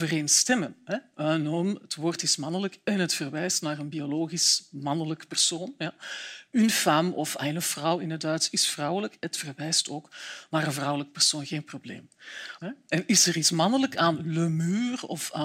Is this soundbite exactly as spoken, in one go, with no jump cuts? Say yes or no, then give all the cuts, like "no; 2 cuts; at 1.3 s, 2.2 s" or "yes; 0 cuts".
no; 1 cut; at 12.6 s